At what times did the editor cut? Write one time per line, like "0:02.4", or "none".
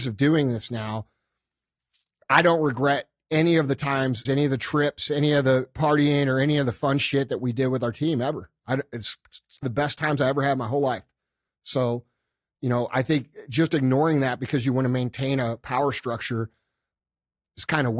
0:04.3
0:09.6